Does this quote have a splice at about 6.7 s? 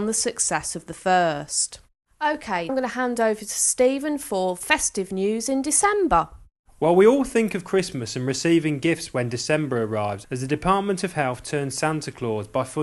no; 2 cuts; at 2.7 s, 10.2 s

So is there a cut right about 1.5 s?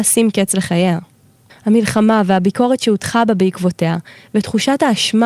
yes; 1 cut; at 1.5 s

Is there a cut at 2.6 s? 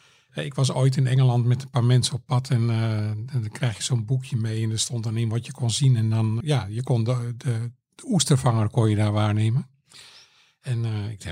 no; 1 cut; at 6.4 s

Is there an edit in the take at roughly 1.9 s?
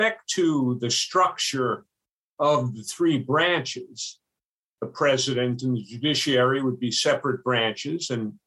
no; 1 cut; at 4.8 s

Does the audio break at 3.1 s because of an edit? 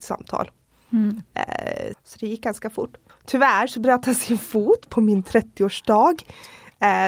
yes; 2 cuts; at 1.9 s, 3.1 s

